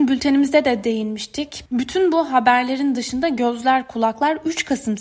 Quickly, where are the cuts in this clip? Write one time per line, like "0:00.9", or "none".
0:01.7